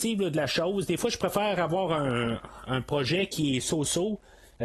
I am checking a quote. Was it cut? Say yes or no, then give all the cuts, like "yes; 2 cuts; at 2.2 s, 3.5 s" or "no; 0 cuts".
yes; 1 cut; at 2.7 s